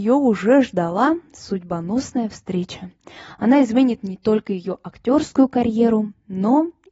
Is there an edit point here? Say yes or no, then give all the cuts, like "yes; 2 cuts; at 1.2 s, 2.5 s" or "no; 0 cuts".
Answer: no; 0 cuts